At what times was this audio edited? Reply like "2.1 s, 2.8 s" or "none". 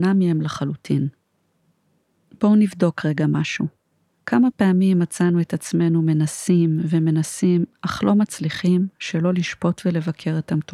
none